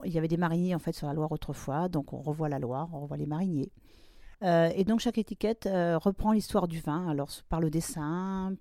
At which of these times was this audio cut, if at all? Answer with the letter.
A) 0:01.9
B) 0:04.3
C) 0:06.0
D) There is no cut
B